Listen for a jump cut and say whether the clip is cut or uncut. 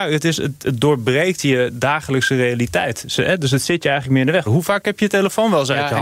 cut